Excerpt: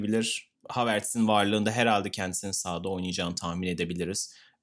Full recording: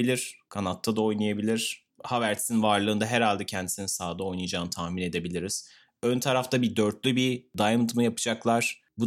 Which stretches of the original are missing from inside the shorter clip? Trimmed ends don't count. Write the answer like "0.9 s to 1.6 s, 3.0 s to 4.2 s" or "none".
none

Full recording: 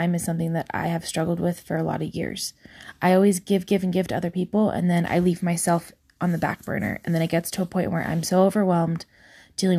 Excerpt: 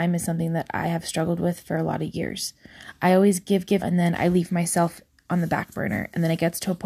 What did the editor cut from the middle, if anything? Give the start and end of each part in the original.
3.8 s to 4.7 s

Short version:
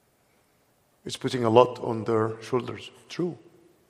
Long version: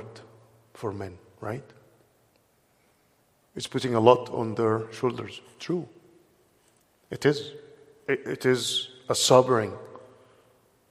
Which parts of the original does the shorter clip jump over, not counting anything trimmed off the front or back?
none

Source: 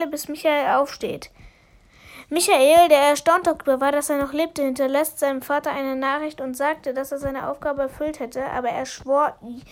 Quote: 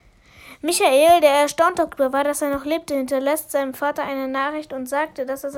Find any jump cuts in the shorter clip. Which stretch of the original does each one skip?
none

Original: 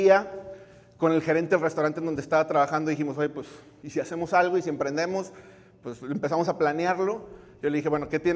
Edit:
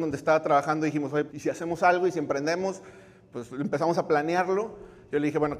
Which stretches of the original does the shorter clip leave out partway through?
3.3 s to 3.8 s

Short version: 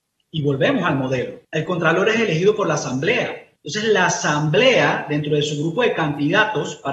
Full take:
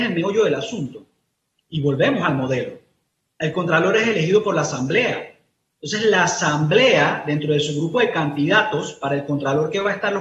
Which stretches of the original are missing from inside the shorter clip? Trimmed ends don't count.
2.8 s to 3.3 s, 5.4 s to 5.7 s

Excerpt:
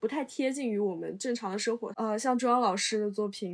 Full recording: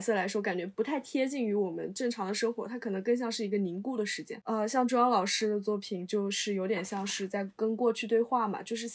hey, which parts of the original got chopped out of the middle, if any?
2.7 s to 4.4 s

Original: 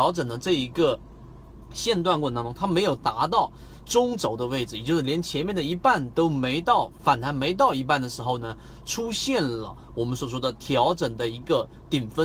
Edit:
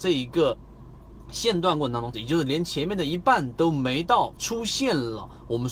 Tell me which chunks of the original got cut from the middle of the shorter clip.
2.6 s to 4.7 s, 6.9 s to 8.8 s

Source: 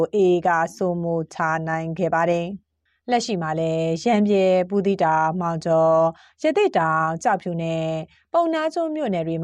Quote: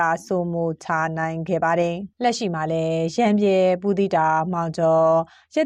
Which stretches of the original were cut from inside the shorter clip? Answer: 2.6 s to 3.0 s

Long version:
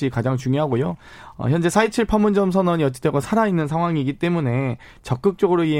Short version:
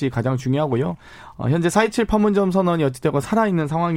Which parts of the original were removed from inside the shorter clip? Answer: none

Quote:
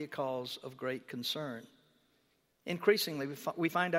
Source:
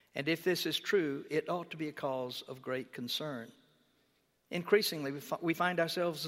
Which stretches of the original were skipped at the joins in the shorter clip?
none

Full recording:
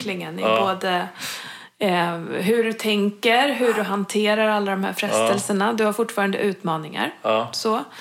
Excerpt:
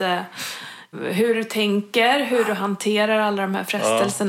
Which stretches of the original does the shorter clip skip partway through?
1.8 s to 2.2 s

